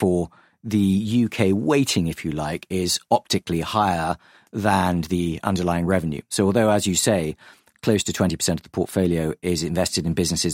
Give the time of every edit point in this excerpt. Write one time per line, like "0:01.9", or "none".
none